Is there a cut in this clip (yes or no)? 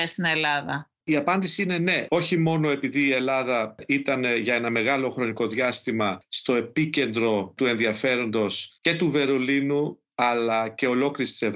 yes